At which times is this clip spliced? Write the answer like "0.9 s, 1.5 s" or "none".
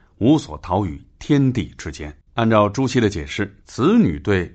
2.2 s, 3.6 s